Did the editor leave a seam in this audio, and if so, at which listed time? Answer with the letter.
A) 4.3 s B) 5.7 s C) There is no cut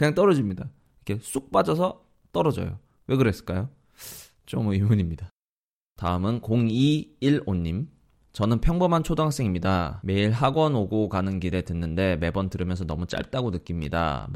C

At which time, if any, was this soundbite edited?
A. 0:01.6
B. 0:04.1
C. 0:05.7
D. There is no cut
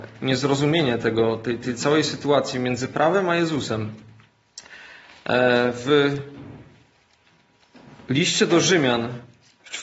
A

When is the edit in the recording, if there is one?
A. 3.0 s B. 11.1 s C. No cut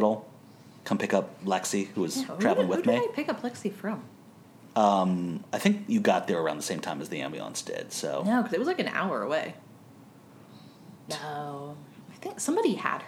B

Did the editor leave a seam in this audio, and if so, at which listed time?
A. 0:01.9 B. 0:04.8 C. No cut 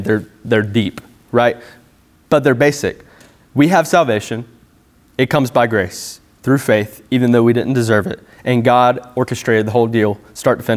C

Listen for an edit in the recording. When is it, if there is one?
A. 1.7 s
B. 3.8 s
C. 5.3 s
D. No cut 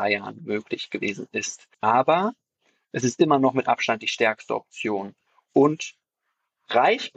A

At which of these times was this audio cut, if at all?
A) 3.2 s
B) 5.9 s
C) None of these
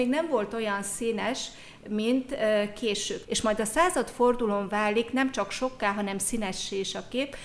A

